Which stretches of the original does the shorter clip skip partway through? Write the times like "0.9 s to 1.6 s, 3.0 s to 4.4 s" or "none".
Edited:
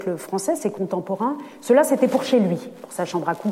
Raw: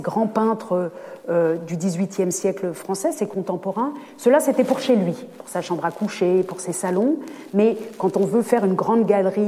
none

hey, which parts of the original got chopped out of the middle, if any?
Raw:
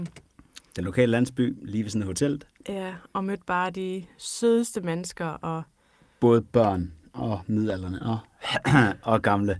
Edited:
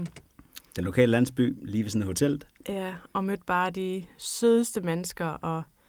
none

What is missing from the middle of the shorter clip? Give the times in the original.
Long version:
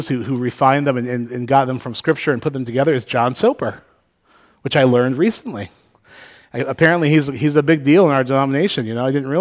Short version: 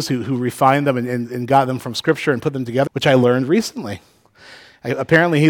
2.9 s to 4.6 s

